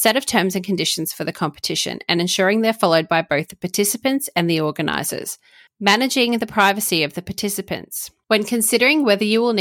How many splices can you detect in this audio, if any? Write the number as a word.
two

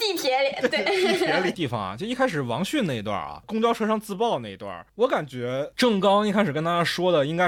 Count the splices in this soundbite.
one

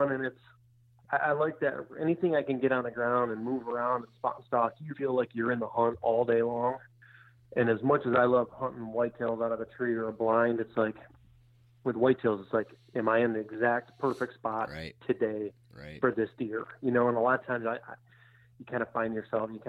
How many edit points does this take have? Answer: one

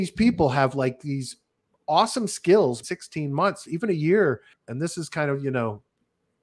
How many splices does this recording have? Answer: two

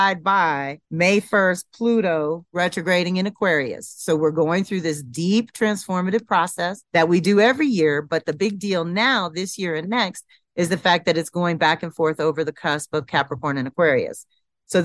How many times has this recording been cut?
zero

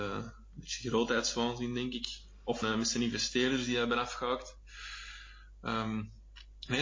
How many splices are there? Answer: one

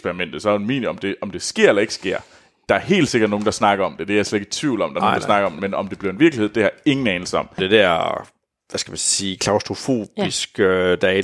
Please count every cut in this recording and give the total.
one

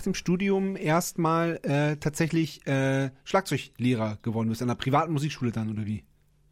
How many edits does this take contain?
zero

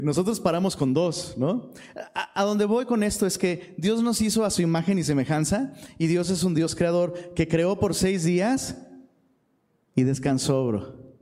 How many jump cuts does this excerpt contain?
zero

